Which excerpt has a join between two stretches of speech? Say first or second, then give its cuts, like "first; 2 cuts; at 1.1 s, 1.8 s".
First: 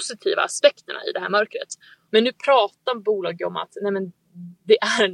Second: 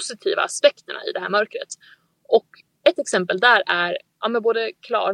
first; 1 cut; at 2.1 s